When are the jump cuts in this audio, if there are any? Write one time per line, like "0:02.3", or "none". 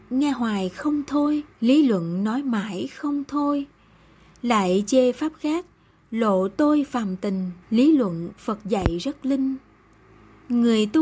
0:01.5
0:07.6